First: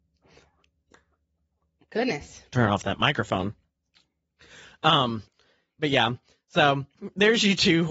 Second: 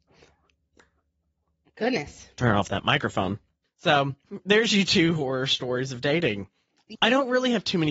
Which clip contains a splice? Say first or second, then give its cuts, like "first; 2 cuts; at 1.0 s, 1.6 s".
second; 2 cuts; at 3.6 s, 6.9 s